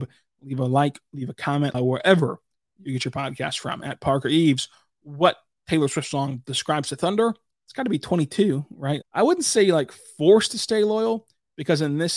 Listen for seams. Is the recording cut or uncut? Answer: cut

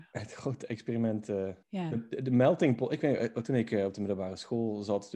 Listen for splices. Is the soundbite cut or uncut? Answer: cut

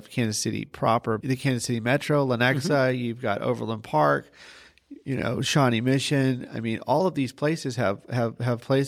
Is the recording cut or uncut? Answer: cut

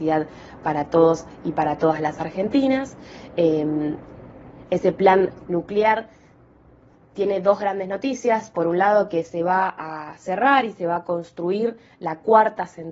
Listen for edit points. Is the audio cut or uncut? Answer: uncut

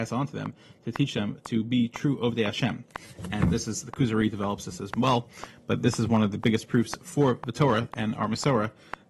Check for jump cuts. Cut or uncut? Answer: uncut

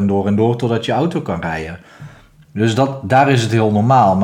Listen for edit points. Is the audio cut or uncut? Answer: uncut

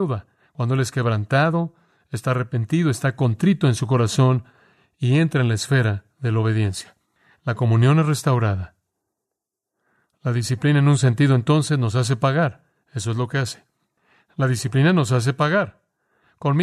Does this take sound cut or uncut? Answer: uncut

